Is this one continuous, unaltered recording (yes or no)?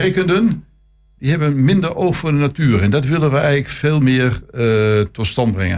yes